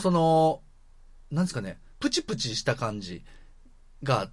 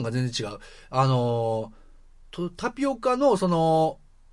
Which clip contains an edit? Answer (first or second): first